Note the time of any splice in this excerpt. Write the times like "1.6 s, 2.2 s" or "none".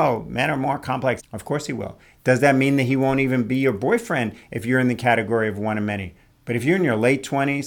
1.2 s, 6.4 s